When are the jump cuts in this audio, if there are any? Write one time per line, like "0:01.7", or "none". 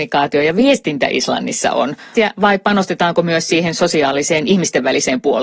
0:02.1